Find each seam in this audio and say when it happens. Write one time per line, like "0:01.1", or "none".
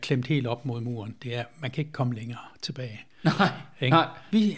none